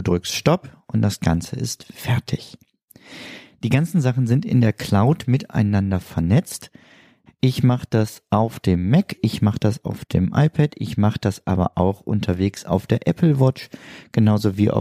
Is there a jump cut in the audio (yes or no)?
yes